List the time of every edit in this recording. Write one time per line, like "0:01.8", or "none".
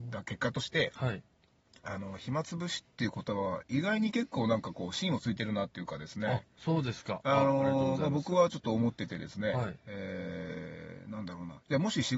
none